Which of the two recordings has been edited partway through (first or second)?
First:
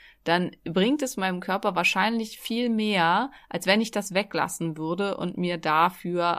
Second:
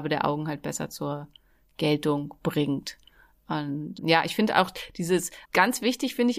second